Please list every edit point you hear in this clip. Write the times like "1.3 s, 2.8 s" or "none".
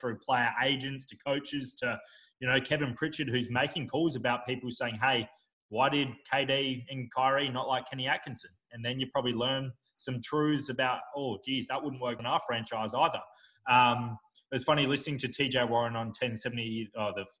12.2 s